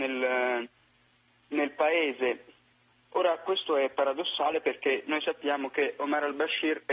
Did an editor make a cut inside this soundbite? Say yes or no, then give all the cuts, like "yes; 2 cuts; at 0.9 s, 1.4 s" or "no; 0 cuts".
no; 0 cuts